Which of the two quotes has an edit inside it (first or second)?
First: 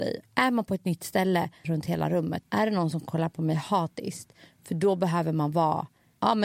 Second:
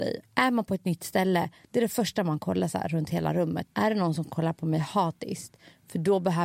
first